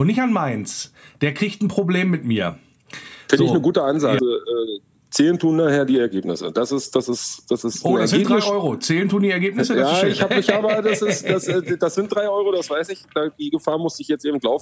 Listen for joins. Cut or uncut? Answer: cut